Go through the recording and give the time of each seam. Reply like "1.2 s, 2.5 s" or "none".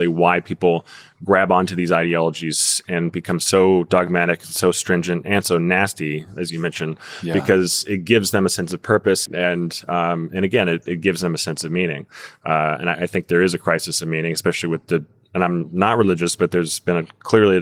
9.3 s